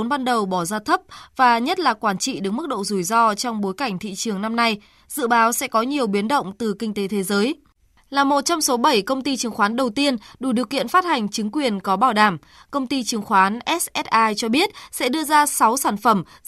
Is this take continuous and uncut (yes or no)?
yes